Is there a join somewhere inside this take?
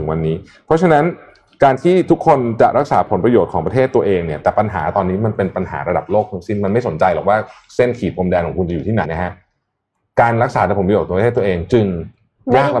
yes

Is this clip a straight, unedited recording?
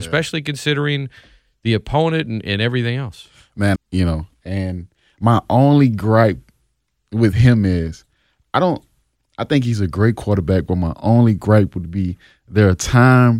no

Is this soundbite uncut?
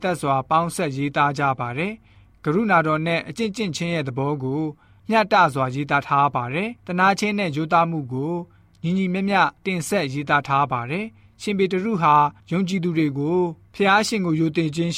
no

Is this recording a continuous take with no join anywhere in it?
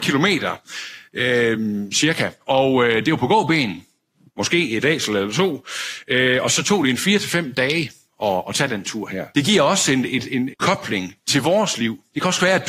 no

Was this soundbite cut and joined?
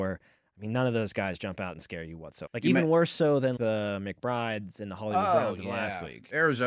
yes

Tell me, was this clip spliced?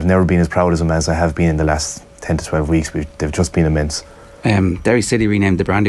no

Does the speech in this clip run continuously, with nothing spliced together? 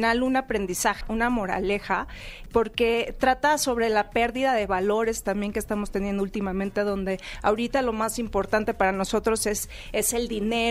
no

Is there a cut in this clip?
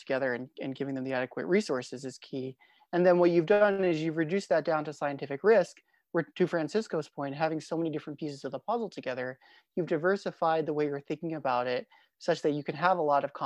no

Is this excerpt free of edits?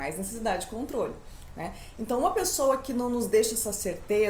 yes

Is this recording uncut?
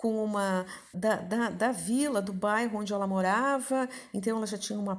no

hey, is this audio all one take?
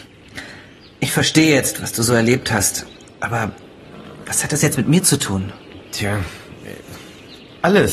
yes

